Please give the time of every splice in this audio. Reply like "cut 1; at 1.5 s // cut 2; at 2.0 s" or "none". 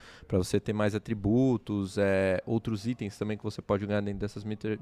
none